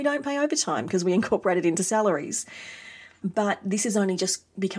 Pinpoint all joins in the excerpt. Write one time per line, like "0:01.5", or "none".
0:03.2